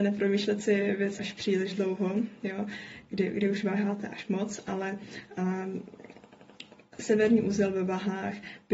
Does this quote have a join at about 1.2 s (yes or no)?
yes